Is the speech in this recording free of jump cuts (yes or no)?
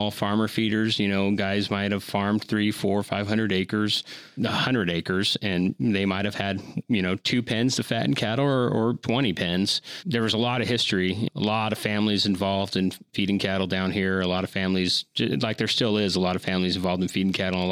yes